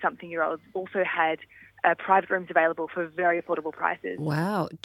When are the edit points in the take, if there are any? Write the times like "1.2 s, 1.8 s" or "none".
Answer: none